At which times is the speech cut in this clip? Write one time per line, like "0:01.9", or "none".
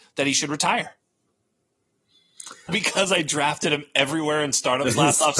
0:02.7

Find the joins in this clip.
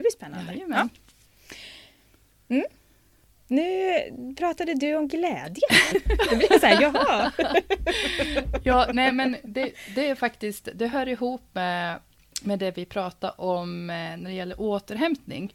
0:05.9

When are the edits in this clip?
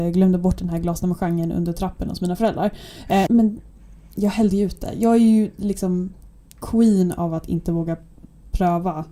0:03.3

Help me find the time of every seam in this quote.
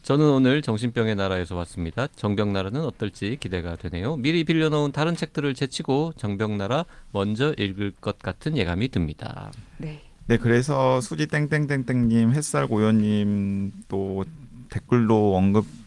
0:02.1

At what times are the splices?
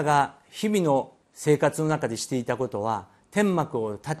0:01.2

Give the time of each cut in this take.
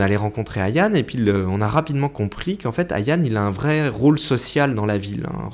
none

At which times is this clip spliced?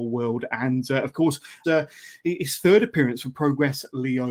0:01.6

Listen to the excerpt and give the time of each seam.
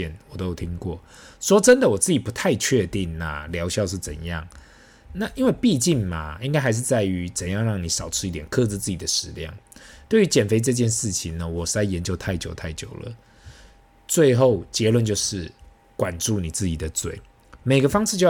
none

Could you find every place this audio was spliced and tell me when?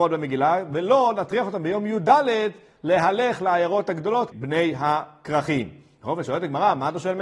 0:04.3

